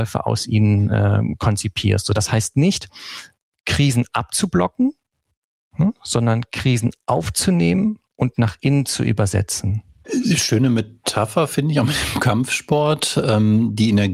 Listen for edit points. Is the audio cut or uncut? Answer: uncut